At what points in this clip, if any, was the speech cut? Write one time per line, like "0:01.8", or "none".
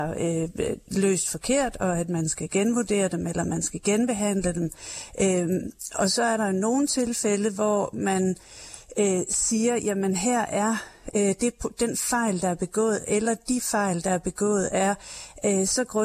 none